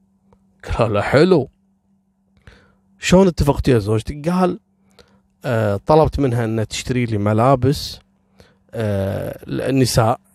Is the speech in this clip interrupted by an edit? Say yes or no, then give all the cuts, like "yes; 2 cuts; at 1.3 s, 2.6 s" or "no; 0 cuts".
no; 0 cuts